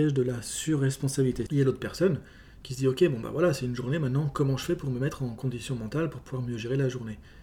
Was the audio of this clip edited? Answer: yes; 1 cut; at 1.5 s

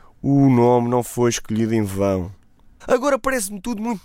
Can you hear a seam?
yes; 1 cut; at 2.8 s

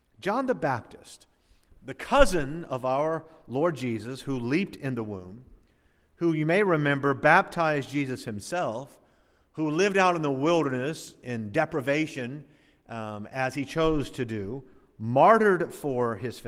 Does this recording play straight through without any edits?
yes; 0 cuts

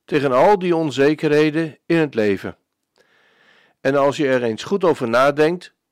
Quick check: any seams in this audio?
no; 0 cuts

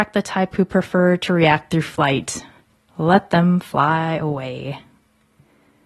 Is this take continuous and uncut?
yes; 0 cuts

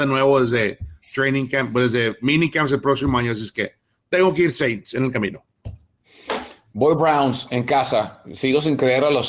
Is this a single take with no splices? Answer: yes; 0 cuts

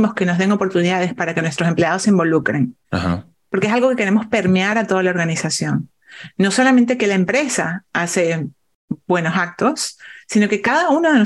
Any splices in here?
yes; 1 cut; at 2.8 s

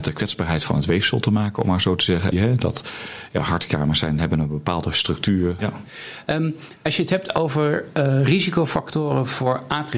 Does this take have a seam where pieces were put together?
yes; 2 cuts; at 2.3 s, 5.6 s

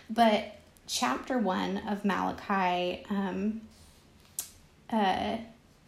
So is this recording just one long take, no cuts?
yes; 0 cuts

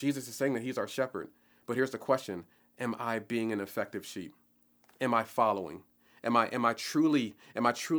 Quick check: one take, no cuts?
yes; 0 cuts

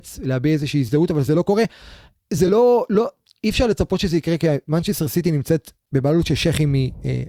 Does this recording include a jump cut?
no; 0 cuts

